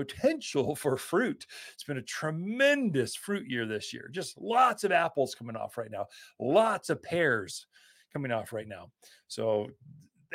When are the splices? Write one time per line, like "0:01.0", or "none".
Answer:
none